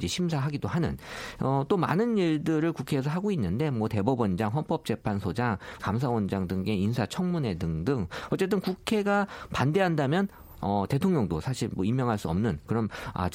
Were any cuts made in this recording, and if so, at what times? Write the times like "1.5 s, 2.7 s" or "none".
5.8 s